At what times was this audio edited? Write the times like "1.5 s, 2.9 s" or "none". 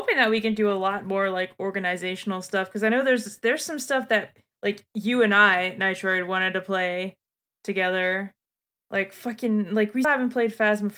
8.7 s, 10.0 s